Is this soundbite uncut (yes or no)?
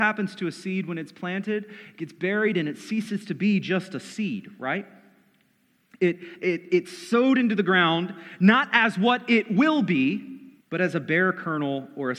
no